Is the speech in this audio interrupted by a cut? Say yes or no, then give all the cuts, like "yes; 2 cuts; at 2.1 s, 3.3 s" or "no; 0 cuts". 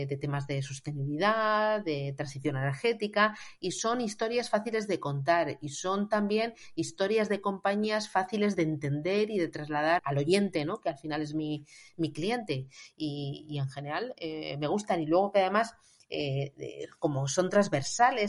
yes; 1 cut; at 10.0 s